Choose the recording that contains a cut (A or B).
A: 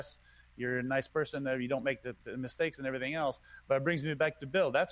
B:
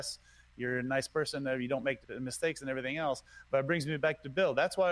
B